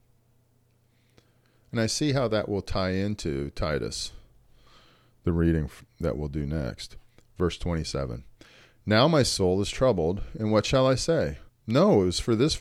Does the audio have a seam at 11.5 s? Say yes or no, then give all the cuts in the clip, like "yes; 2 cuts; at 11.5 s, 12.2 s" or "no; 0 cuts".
yes; 1 cut; at 11.5 s